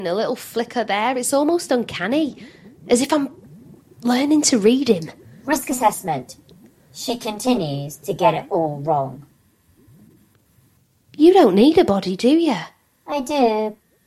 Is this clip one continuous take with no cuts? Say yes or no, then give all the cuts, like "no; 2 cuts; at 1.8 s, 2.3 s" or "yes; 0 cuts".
yes; 0 cuts